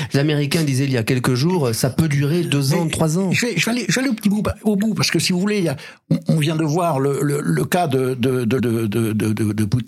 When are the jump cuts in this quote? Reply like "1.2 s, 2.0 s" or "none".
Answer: 7.4 s, 8.6 s